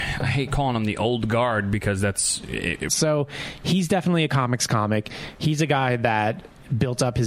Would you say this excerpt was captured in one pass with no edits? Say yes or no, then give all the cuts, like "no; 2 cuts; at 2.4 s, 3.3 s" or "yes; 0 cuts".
no; 1 cut; at 2.9 s